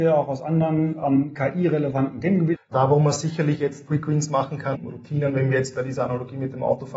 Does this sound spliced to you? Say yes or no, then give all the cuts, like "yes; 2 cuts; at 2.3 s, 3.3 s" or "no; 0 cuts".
yes; 2 cuts; at 2.5 s, 4.8 s